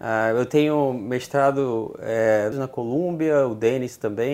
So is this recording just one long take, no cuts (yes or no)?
no